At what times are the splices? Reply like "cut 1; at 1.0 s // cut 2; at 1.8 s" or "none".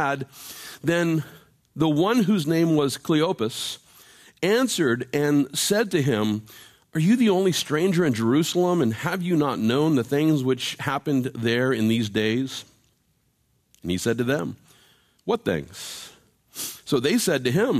none